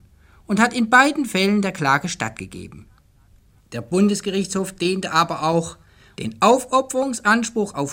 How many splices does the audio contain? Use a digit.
2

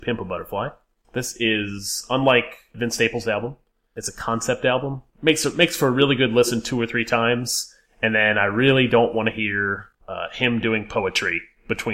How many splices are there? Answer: 0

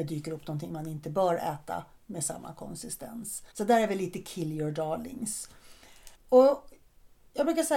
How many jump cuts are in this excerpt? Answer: 2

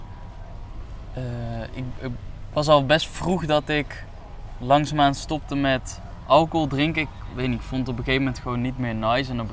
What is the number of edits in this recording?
0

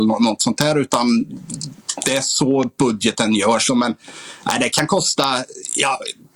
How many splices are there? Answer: 1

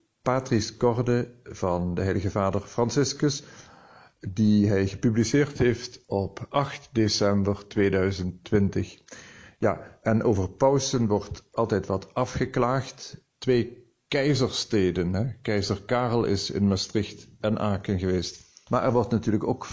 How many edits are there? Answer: 2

